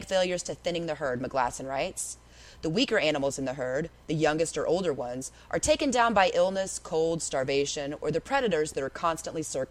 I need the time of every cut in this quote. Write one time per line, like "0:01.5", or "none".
none